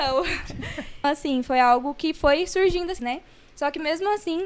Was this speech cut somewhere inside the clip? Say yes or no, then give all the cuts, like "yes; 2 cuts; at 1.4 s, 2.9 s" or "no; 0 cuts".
yes; 2 cuts; at 1.0 s, 3.0 s